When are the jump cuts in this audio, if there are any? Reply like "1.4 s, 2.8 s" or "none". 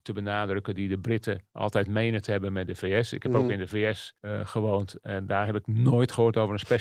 4.2 s